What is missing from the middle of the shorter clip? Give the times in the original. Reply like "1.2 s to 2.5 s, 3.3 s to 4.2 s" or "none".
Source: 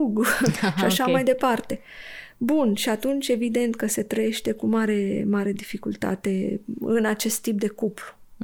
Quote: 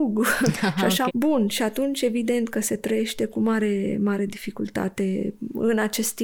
1.1 s to 2.3 s